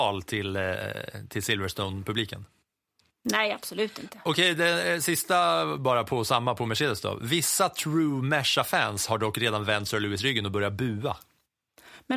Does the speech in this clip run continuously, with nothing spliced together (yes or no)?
yes